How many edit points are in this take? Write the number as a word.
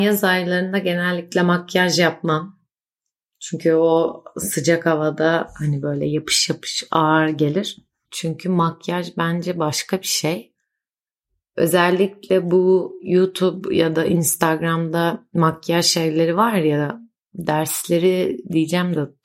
one